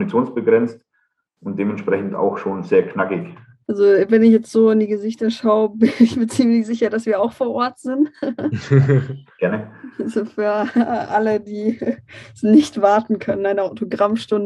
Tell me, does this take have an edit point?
no; 0 cuts

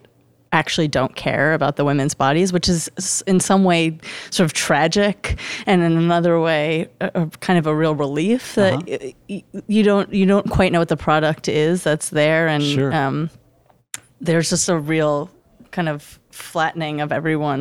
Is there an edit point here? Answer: no; 0 cuts

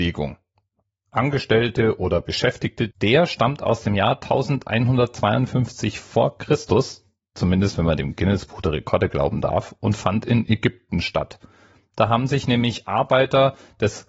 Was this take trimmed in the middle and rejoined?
yes; 1 cut; at 2.9 s

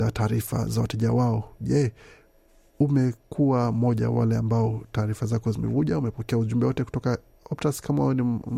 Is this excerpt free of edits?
yes; 0 cuts

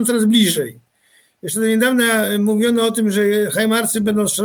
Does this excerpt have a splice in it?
no; 0 cuts

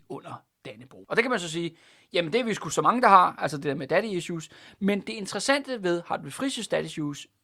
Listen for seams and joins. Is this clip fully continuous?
no; 1 cut; at 1.1 s

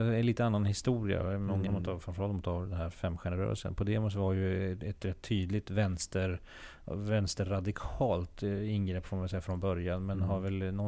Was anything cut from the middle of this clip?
yes; 1 cut; at 1.7 s

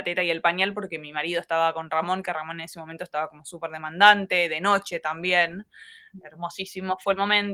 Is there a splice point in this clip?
no; 0 cuts

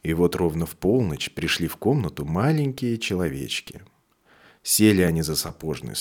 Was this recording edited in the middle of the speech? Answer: no; 0 cuts

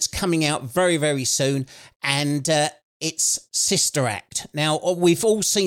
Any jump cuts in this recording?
no; 0 cuts

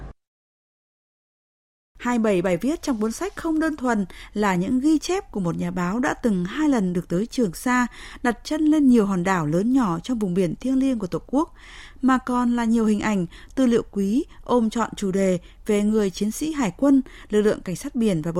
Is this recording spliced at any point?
no; 0 cuts

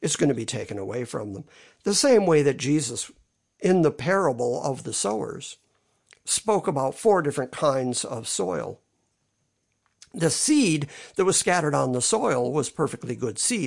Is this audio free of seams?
yes; 0 cuts

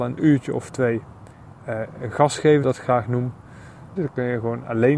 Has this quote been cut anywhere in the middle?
yes; 2 cuts; at 2.6 s, 4.0 s

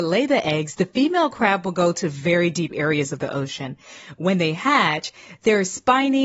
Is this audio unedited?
yes; 0 cuts

